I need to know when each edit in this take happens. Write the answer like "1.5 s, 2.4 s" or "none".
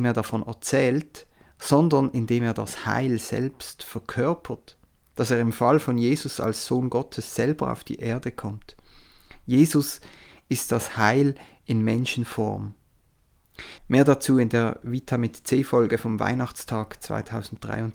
13.8 s